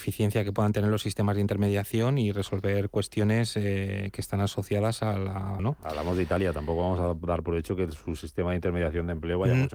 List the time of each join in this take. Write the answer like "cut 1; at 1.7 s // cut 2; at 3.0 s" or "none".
cut 1; at 5.6 s